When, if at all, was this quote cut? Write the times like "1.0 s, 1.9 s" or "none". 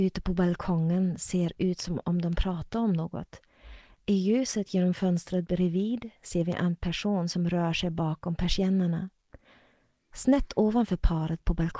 none